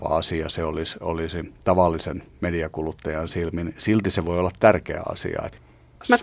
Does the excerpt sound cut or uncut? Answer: uncut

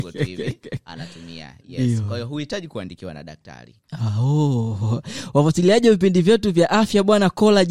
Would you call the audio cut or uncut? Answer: uncut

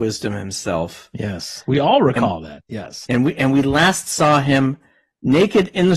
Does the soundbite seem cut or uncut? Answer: uncut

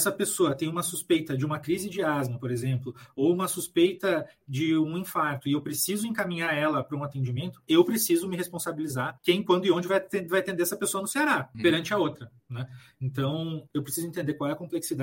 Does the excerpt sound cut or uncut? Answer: cut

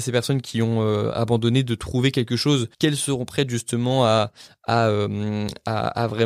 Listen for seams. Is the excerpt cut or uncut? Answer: cut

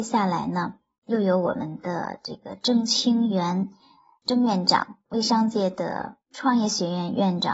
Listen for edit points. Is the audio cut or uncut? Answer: uncut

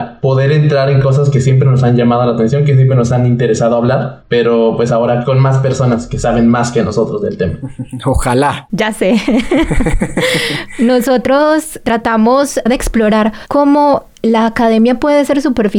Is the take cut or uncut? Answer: cut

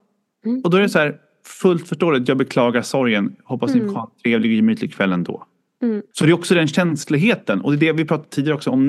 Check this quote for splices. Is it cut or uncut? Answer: cut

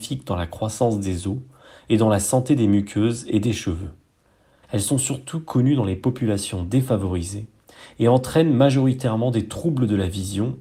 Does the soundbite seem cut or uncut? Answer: cut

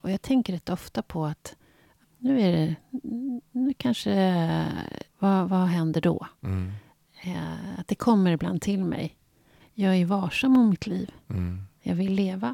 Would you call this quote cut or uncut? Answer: cut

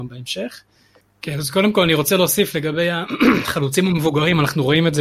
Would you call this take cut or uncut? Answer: cut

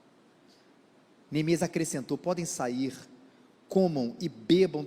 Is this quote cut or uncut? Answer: uncut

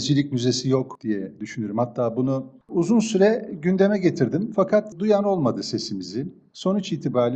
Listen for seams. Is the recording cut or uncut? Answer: uncut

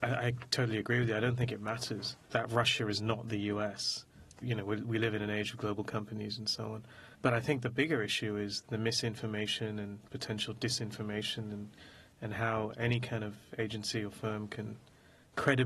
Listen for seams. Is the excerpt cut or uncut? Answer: cut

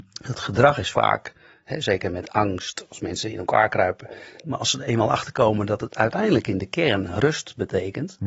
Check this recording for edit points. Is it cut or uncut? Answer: cut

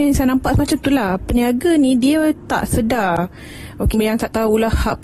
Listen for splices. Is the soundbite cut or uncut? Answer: cut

